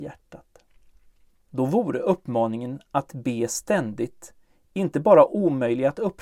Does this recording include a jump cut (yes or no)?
yes